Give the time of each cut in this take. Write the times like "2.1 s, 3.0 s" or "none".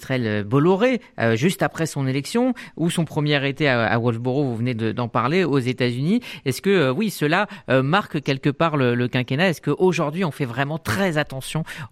none